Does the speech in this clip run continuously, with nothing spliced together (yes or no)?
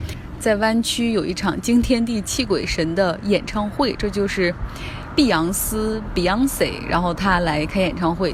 yes